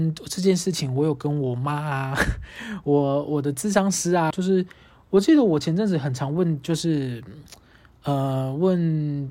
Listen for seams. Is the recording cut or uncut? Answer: cut